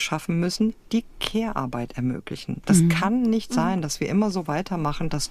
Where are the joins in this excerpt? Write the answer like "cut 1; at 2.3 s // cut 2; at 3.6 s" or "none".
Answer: none

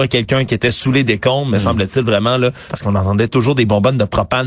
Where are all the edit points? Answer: cut 1; at 2.7 s

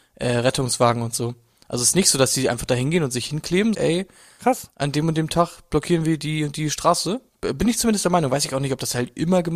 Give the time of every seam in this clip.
cut 1; at 3.7 s

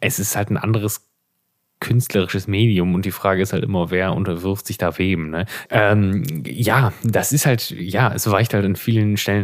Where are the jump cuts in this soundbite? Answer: cut 1; at 5.7 s

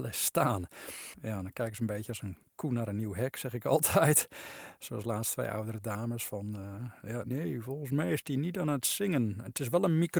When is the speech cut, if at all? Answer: cut 1; at 7.3 s

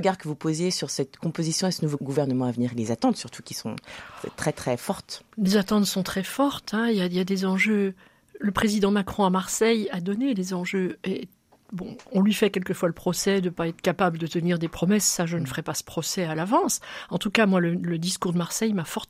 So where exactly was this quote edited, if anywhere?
none

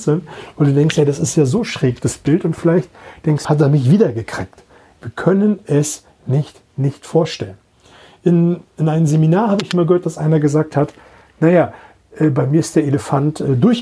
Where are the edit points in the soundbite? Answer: cut 1; at 3.4 s // cut 2; at 8.7 s

